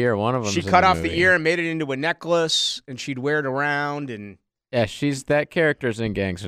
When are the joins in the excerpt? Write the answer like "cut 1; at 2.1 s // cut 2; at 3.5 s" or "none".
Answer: none